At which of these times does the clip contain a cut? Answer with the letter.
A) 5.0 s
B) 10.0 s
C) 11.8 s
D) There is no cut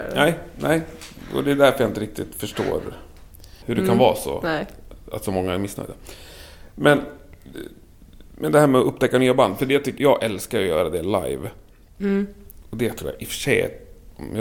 B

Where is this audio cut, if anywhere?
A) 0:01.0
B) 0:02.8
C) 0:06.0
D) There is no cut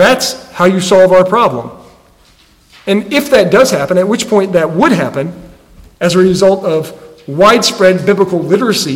D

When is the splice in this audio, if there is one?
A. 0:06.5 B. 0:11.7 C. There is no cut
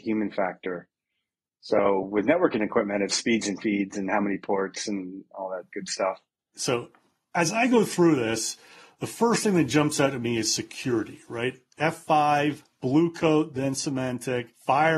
A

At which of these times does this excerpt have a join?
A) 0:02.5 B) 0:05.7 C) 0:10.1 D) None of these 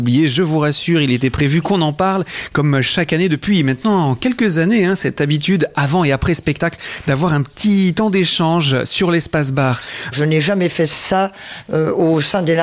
C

